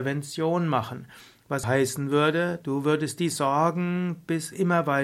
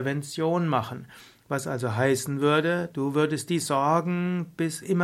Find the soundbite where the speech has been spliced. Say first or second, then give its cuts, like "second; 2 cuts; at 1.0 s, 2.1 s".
first; 1 cut; at 1.6 s